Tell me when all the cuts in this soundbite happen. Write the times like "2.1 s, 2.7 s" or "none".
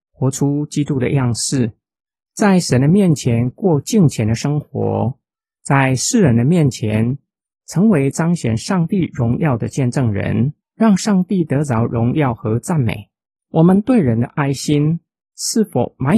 13.4 s